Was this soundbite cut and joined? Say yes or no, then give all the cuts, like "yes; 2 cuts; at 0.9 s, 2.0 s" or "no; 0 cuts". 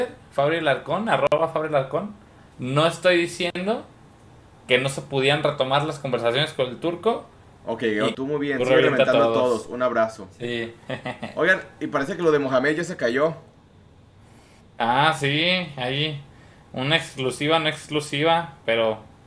yes; 2 cuts; at 2.5 s, 8.1 s